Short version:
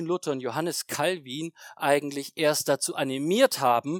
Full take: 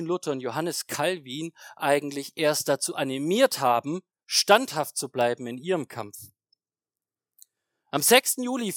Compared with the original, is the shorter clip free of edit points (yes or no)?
yes